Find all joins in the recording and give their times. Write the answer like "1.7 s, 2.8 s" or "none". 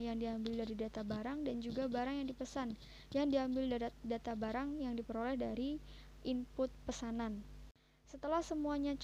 none